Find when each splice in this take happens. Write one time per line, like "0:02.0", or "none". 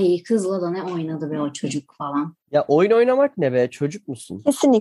0:02.4